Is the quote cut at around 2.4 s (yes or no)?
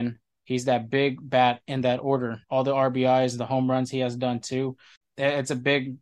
yes